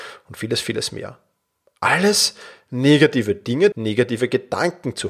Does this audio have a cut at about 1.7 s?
no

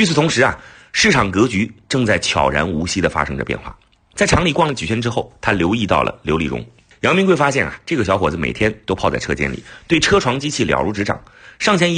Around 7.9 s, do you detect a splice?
no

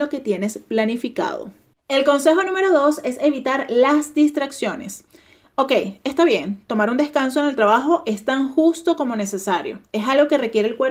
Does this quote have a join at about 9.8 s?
no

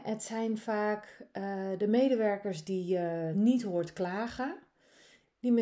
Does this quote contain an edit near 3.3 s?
yes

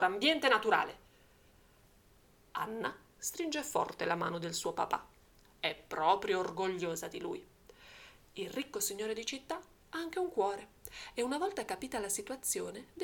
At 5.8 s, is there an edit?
no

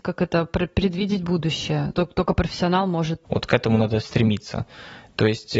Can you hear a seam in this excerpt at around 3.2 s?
yes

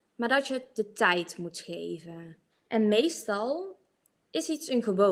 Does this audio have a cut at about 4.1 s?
yes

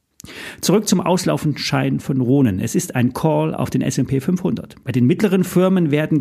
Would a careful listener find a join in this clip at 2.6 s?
no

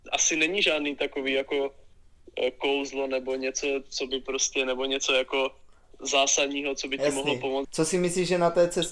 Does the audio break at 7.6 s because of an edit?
yes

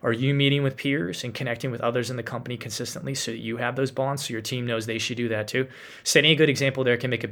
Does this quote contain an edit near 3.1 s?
no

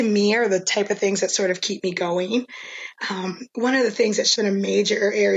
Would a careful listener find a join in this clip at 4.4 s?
yes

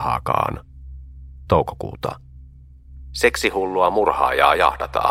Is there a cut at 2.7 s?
no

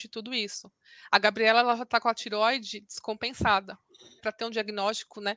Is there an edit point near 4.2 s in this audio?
yes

